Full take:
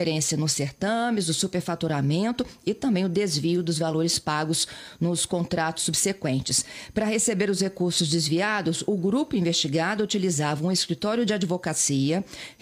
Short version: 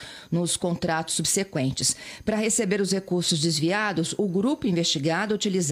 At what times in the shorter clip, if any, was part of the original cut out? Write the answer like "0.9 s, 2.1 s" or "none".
none